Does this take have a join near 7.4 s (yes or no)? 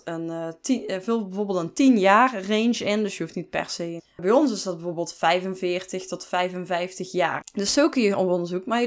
yes